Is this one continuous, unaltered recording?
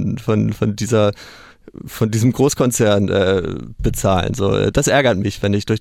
no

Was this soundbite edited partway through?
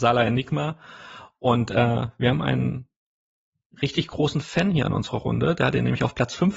no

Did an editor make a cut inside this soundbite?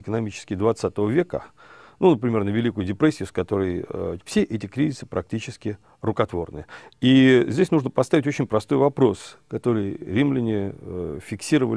yes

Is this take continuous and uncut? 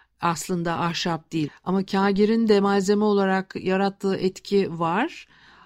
no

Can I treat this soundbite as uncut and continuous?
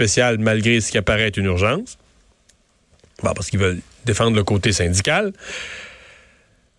yes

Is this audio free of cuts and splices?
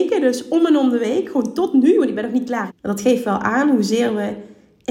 no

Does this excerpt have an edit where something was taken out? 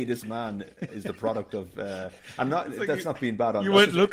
no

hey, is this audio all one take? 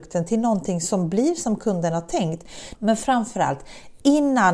no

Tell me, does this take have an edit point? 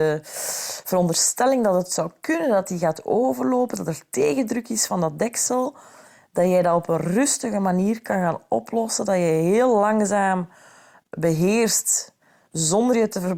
no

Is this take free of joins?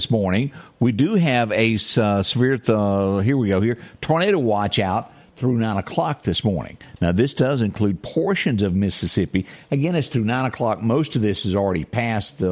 yes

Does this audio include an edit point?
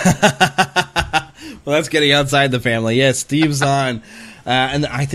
no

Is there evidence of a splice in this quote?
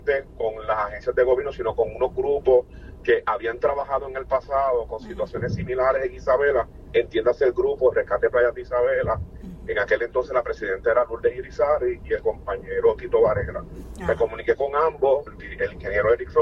yes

